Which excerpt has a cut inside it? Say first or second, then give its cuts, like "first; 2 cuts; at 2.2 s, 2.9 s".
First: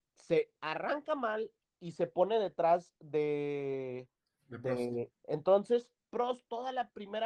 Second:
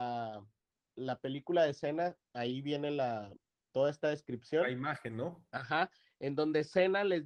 first; 1 cut; at 5.1 s